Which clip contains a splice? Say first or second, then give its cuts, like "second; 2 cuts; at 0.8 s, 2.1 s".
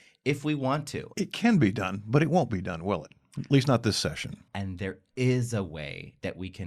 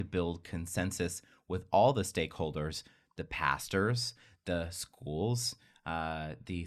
first; 2 cuts; at 1.1 s, 4.5 s